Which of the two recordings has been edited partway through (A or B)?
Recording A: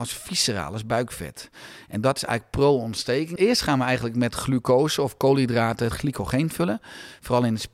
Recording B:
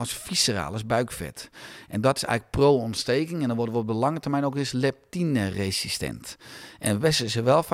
A